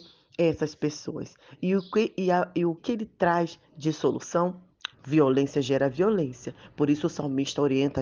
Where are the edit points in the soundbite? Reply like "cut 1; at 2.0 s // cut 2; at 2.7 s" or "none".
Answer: cut 1; at 2.8 s // cut 2; at 4.9 s